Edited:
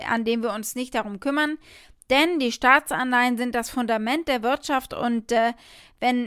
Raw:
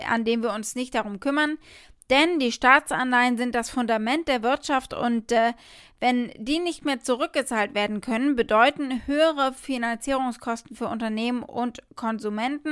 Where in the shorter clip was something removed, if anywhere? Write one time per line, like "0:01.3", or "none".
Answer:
none